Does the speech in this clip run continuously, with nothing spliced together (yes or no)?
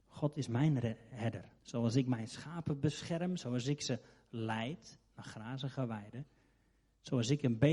no